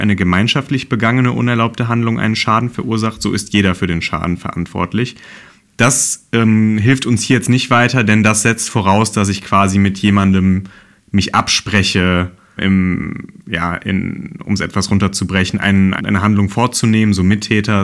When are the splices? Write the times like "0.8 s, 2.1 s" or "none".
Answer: 12.6 s, 16.0 s